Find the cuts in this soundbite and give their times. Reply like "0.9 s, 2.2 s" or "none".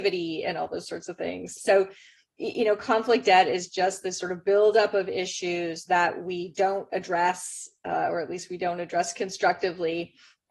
1.6 s